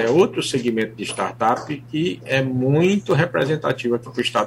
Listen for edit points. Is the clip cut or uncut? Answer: uncut